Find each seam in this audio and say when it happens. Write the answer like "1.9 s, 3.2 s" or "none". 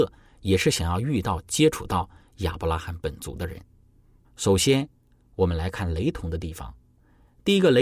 4.2 s